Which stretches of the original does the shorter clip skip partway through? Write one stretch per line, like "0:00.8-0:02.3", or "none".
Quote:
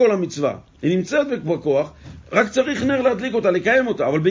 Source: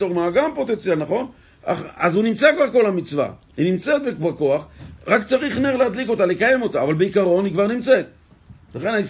none